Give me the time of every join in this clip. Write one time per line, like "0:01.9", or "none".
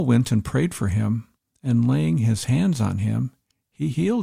none